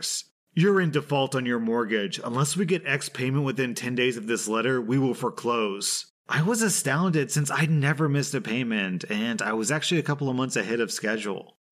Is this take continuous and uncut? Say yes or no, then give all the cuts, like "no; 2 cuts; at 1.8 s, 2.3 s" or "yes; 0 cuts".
yes; 0 cuts